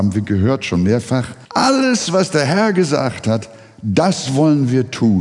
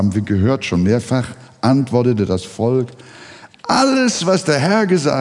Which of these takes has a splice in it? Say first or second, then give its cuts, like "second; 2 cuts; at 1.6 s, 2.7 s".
first; 1 cut; at 1.5 s